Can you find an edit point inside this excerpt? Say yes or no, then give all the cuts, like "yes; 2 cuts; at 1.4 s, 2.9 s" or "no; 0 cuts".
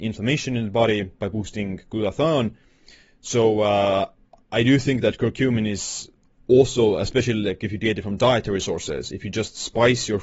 no; 0 cuts